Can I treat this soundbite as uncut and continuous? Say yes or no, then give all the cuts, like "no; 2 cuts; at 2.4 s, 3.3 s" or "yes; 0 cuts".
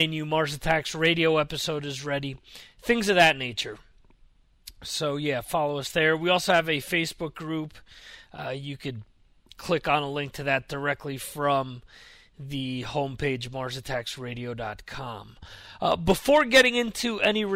yes; 0 cuts